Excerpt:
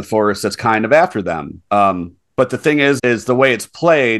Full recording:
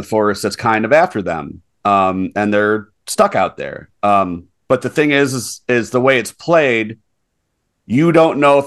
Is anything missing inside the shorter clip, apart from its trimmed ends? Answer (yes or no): yes